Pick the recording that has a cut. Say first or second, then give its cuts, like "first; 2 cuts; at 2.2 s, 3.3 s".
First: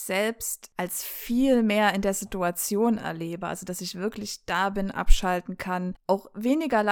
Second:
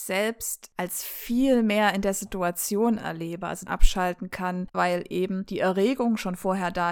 second; 2 cuts; at 3.7 s, 4.7 s